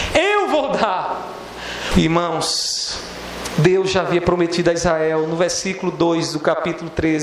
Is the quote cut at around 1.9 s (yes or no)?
yes